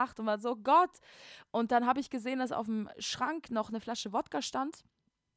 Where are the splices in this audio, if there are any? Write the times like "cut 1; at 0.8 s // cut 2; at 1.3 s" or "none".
none